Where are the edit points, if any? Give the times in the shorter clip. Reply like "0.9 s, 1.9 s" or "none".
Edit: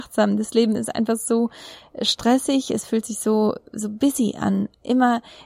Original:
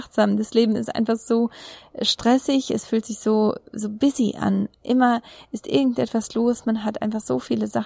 none